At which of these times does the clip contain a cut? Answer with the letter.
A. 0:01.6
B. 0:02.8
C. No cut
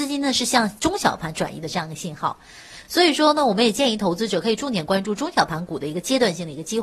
C